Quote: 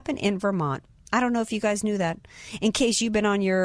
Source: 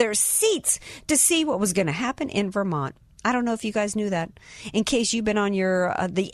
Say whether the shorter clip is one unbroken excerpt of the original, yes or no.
yes